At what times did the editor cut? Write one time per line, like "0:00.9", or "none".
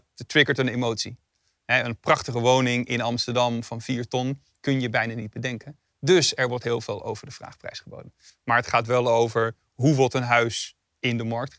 0:08.3